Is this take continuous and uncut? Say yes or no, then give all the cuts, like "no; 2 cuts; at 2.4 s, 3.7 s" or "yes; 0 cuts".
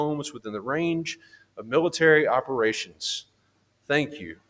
yes; 0 cuts